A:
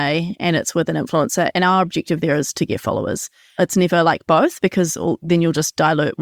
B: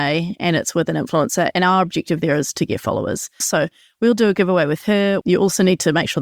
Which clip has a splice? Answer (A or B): B